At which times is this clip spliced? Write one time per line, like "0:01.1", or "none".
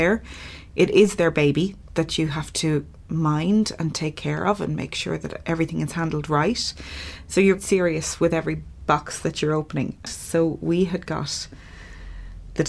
0:07.6
0:10.1